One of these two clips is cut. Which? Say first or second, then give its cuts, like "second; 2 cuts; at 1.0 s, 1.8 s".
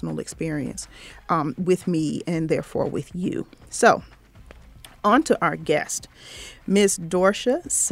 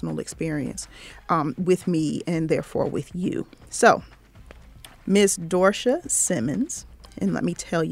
second; 1 cut; at 5.0 s